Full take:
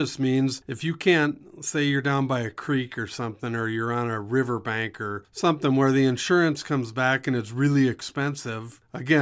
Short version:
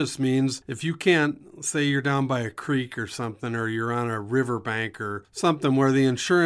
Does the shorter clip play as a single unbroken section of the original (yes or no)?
yes